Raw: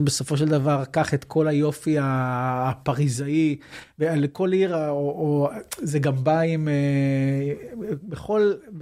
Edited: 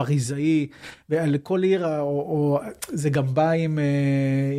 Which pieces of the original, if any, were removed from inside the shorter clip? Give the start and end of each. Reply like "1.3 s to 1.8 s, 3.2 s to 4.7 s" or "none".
none